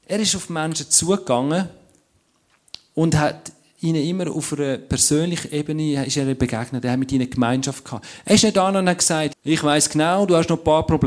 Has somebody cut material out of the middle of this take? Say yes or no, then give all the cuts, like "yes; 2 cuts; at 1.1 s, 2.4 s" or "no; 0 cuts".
yes; 1 cut; at 9.3 s